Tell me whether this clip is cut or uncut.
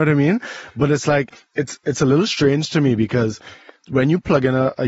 cut